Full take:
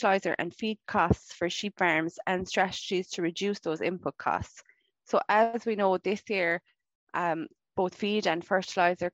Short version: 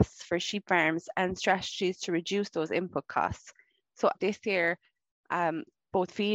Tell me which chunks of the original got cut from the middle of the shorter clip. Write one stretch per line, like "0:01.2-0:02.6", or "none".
0:05.2-0:06.0

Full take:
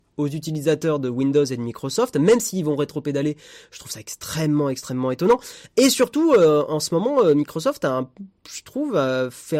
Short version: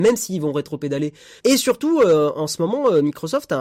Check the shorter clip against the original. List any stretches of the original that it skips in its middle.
0:03.6-0:05.7

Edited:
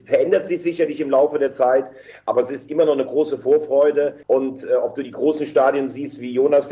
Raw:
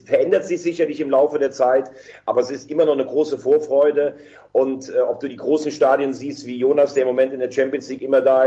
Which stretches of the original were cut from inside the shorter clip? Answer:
0:04.2-0:04.5

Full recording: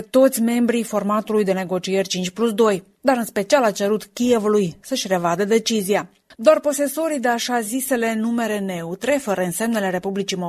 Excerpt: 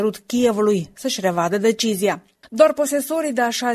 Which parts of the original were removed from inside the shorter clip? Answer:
none

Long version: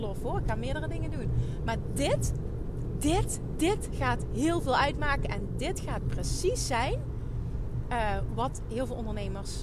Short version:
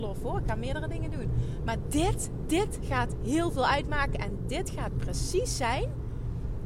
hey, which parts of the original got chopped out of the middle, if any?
0:01.9-0:03.0

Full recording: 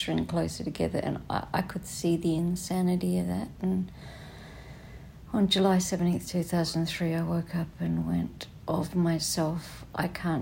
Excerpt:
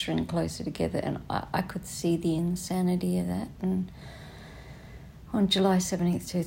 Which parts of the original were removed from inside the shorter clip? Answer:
none

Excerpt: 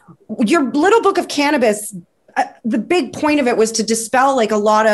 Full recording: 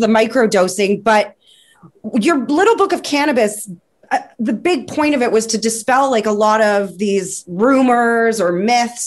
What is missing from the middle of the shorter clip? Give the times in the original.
none

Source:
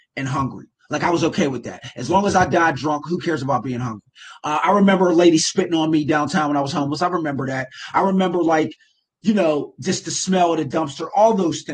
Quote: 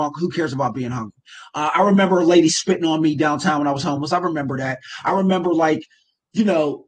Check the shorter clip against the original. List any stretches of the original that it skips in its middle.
none

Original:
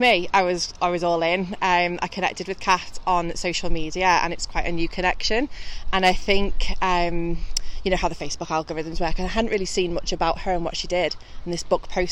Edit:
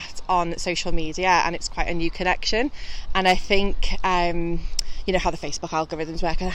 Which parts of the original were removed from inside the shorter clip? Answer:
none

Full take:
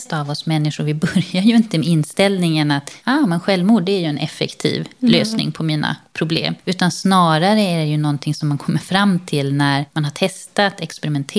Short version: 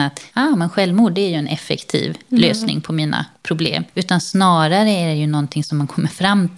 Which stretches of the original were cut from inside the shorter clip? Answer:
none

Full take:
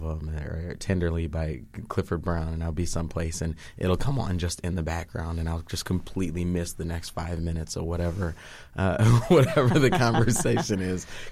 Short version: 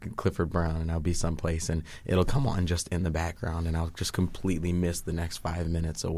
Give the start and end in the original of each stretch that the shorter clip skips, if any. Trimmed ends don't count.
none

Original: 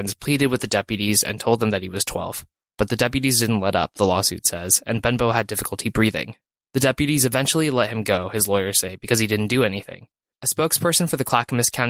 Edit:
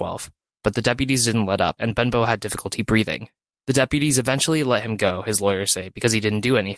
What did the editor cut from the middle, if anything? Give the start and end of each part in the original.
0:03.9-0:04.8

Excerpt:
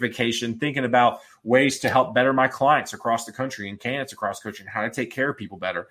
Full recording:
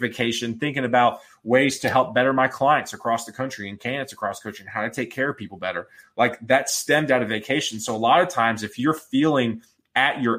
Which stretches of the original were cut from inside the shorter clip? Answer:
none

